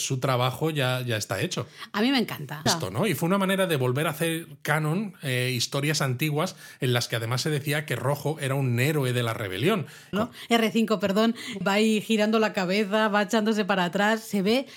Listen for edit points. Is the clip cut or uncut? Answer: cut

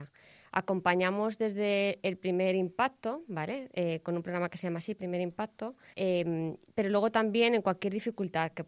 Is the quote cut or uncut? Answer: cut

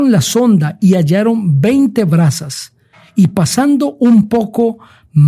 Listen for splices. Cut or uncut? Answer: uncut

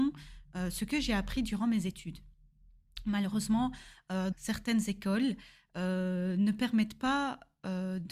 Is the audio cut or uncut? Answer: cut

